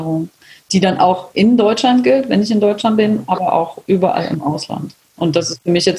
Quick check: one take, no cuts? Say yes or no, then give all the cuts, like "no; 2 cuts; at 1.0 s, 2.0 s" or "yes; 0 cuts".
yes; 0 cuts